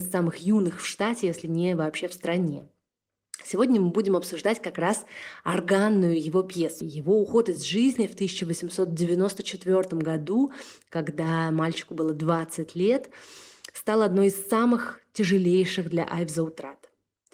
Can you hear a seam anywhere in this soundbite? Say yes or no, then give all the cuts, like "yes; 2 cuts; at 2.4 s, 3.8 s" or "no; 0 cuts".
yes; 1 cut; at 6.8 s